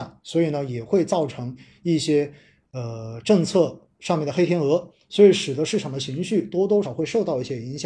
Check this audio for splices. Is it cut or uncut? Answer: cut